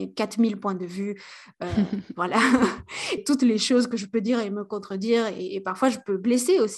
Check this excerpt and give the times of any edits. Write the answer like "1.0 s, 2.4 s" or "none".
3.2 s